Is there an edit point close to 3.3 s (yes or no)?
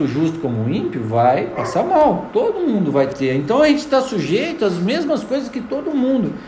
no